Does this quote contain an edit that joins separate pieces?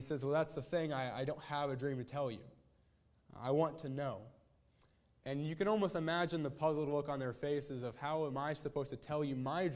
yes; 1 cut; at 3.2 s

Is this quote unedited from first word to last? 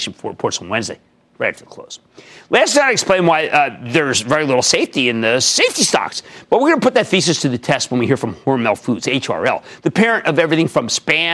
yes; 0 cuts

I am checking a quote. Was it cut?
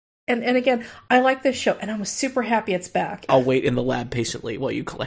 yes; 1 cut; at 3.3 s

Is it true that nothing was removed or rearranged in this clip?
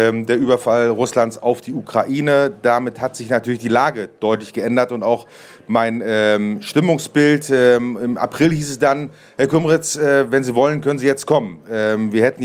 yes; 0 cuts

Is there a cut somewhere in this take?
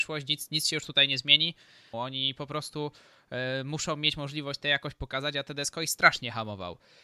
yes; 1 cut; at 1.9 s

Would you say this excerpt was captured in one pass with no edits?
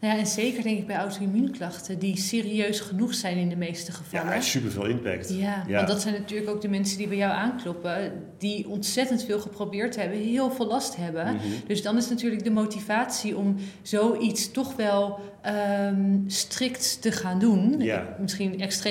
yes; 0 cuts

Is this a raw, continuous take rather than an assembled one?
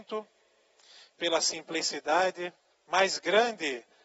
no; 1 cut; at 2.7 s

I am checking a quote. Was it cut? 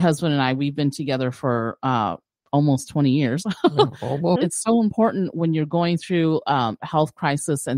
yes; 1 cut; at 4.4 s

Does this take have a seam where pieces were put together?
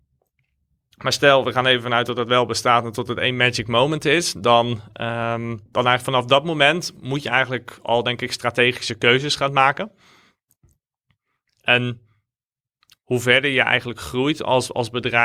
yes; 1 cut; at 5.7 s

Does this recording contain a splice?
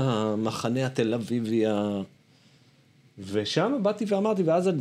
no; 0 cuts

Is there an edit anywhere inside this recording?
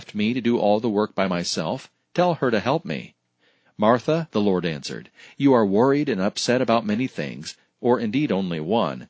yes; 2 cuts; at 4.3 s, 7.7 s

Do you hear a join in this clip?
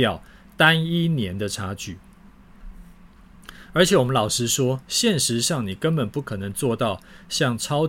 no; 0 cuts

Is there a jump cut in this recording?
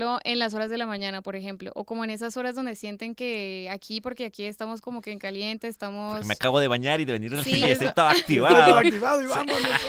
yes; 1 cut; at 7.6 s

